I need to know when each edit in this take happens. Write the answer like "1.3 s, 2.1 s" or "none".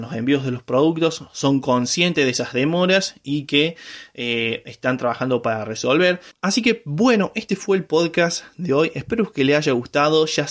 6.3 s